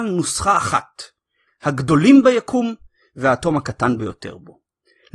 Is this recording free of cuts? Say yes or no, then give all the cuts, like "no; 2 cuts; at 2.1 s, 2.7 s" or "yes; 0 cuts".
no; 1 cut; at 1.5 s